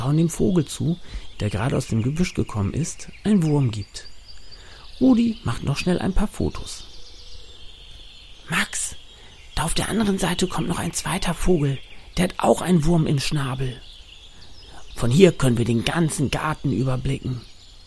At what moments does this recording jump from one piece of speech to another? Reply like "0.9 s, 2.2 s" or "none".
1.3 s, 14.9 s